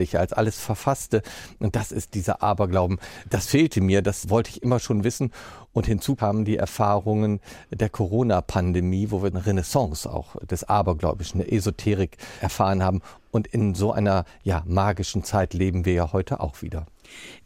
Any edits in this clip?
no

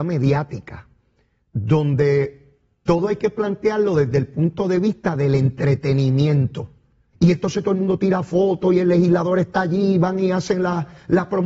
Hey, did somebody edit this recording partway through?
yes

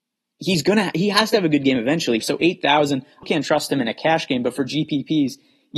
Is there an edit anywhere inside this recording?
yes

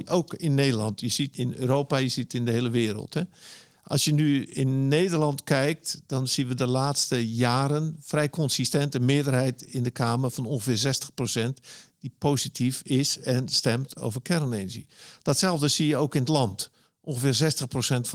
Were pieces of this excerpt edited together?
yes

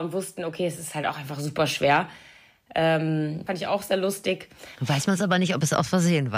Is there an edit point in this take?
yes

